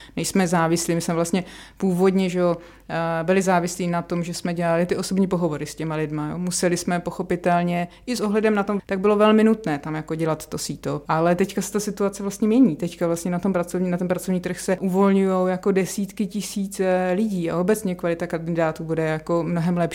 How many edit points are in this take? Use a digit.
1